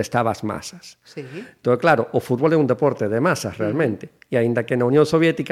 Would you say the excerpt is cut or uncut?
uncut